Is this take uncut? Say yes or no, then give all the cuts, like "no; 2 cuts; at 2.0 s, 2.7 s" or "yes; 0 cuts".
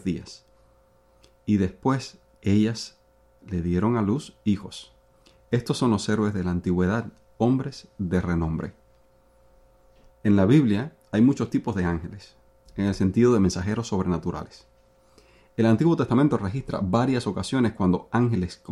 no; 2 cuts; at 2.4 s, 10.1 s